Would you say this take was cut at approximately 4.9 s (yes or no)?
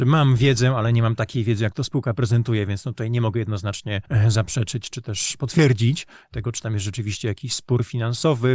yes